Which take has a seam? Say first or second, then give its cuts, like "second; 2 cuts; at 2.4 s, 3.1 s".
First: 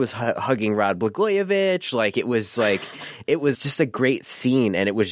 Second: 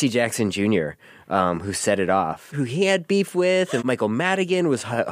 second; 2 cuts; at 2.5 s, 3.8 s